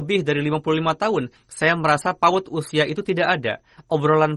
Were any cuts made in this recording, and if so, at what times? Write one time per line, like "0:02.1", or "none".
0:01.4